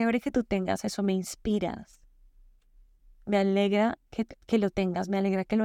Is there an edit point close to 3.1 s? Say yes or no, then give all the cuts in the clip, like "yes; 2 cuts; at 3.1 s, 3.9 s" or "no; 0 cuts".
no; 0 cuts